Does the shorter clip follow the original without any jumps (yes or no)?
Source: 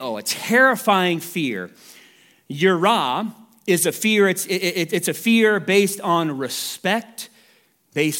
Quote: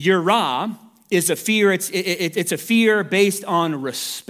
yes